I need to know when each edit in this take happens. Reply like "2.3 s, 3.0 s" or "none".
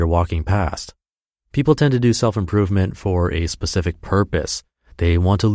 none